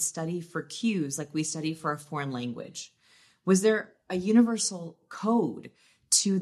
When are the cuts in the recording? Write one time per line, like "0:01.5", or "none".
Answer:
none